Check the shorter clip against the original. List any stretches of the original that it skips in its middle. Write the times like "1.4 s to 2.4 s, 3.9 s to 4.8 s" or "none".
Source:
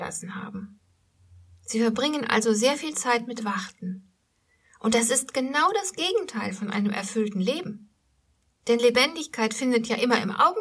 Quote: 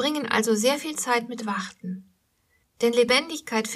4.6 s to 8.5 s